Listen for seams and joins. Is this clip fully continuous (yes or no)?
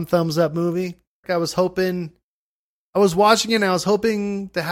no